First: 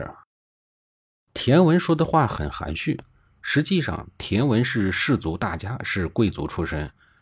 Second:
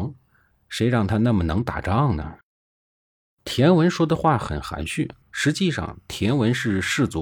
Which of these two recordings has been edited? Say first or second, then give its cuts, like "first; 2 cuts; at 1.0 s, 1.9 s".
second; 2 cuts; at 3.3 s, 5.2 s